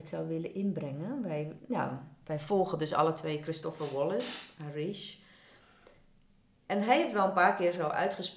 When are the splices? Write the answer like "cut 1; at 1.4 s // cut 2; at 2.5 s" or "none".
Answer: none